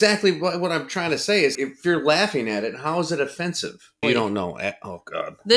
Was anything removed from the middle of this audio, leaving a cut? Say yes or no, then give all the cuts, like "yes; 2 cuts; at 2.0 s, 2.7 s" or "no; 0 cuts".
yes; 2 cuts; at 1.5 s, 4.0 s